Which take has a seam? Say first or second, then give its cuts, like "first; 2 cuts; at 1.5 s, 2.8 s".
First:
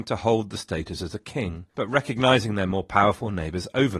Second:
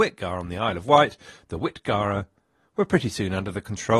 first; 1 cut; at 1.7 s